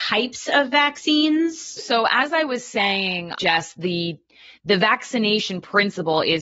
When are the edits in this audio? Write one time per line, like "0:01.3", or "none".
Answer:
0:01.8
0:03.4